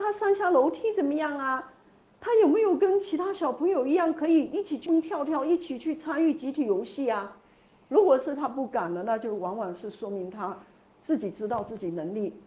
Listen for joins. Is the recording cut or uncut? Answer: cut